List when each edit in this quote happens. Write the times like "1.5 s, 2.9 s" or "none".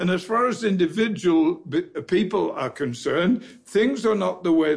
none